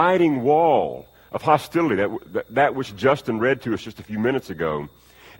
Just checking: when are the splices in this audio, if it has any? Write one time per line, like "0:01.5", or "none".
none